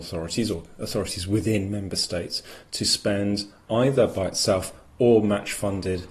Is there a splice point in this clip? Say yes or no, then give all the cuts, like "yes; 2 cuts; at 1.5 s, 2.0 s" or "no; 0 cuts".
no; 0 cuts